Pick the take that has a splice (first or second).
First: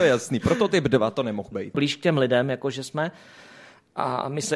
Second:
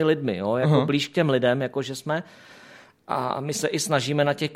first